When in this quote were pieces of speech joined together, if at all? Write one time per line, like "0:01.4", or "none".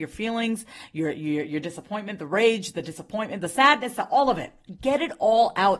none

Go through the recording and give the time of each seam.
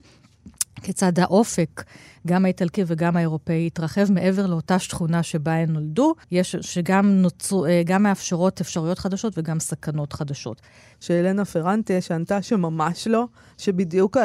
0:06.2
0:10.9

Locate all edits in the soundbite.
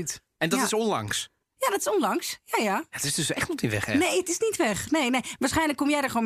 none

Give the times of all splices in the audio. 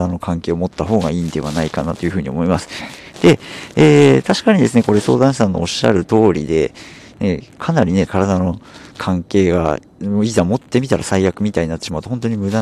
0:03.1
0:08.1

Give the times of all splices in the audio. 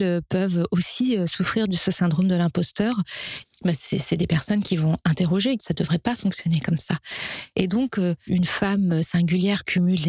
0:03.4
0:05.6
0:08.3

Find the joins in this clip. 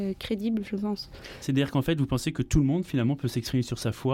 none

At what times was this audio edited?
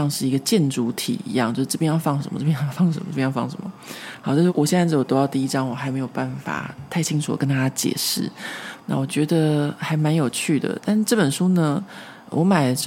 0:04.5
0:08.8

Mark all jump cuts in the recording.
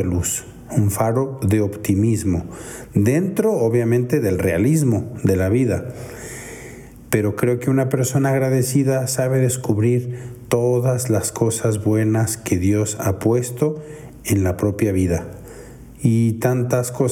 none

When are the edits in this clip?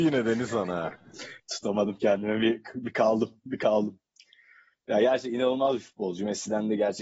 none

